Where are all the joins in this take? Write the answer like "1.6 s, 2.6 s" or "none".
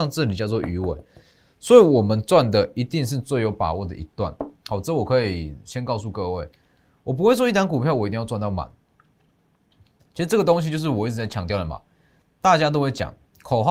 none